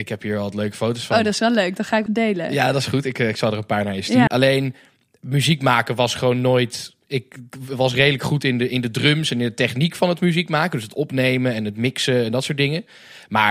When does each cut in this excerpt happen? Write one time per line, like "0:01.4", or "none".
0:02.1
0:04.3